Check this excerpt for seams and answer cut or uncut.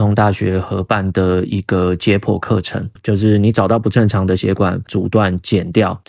cut